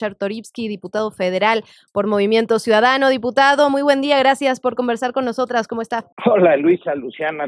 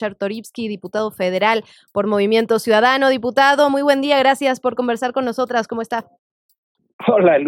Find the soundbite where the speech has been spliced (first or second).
first